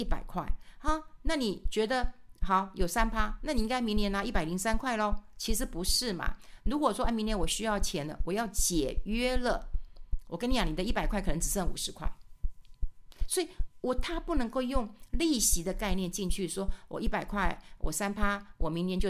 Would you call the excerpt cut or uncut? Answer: uncut